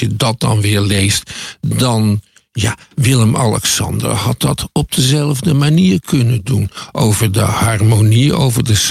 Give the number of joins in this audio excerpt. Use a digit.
0